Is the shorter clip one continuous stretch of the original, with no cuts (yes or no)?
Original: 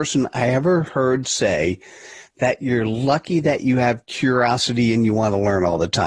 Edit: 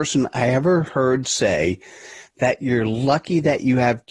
yes